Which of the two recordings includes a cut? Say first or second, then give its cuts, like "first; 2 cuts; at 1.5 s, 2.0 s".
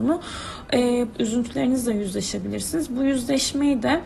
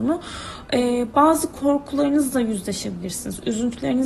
first; 1 cut; at 1.1 s